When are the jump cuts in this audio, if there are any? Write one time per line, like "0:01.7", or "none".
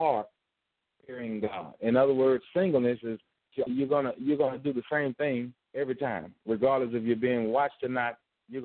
0:03.7
0:05.6

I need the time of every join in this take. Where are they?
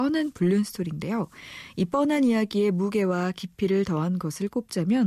none

